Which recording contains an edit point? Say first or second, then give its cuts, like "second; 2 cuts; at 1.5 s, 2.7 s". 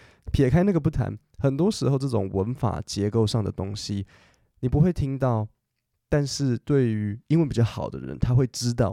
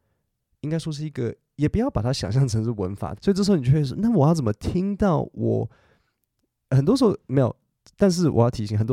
second; 1 cut; at 3.1 s